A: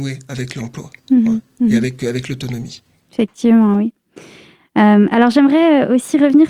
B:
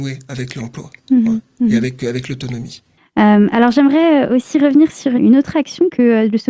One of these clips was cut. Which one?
B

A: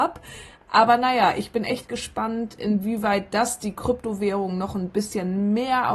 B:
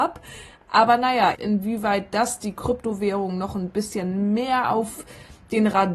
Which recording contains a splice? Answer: B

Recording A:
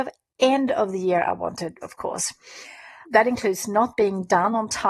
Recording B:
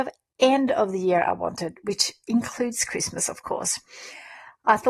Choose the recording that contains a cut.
A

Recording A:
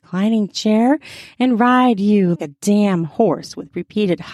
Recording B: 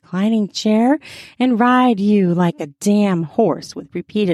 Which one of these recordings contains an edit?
A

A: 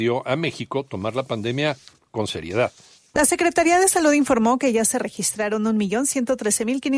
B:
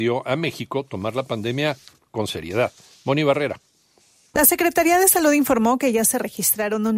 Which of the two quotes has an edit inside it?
A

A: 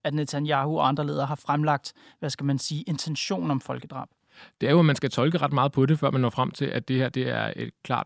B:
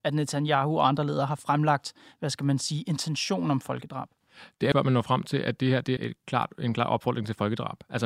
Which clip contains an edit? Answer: B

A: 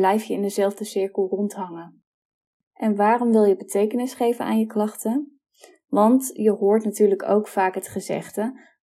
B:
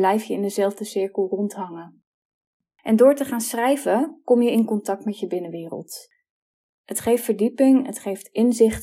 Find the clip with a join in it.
A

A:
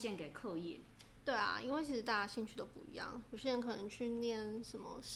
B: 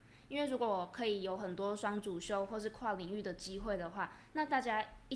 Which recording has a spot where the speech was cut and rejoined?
A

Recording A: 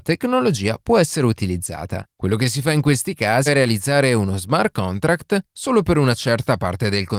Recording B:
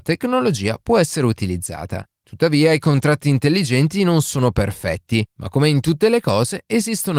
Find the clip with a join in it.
A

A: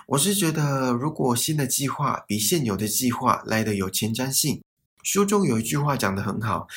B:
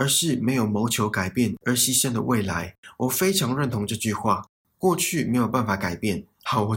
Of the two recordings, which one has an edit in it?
A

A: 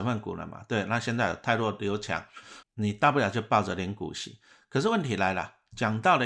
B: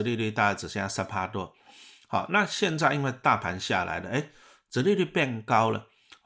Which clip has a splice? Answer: A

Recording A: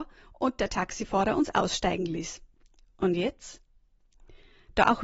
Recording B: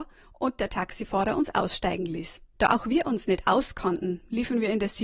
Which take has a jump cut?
B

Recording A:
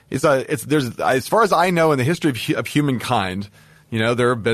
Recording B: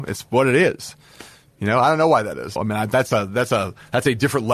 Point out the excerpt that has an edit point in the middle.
B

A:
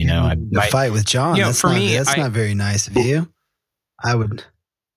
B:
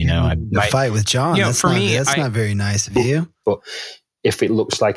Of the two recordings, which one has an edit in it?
B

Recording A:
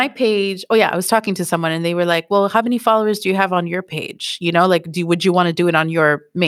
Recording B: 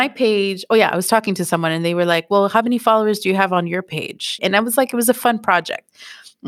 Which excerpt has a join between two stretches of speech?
B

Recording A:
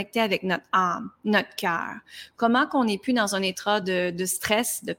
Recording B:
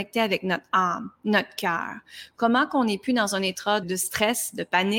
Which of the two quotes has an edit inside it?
B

